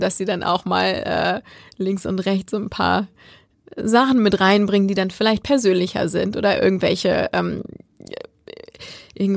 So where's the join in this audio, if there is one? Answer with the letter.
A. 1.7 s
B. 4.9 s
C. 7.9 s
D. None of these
D